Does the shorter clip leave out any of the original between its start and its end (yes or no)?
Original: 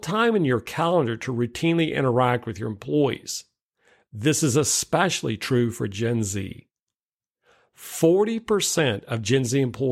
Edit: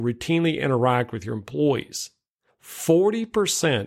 yes